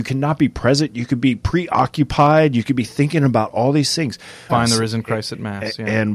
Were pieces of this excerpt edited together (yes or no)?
yes